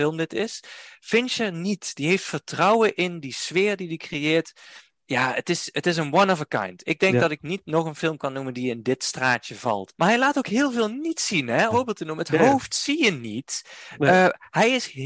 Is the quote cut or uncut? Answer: cut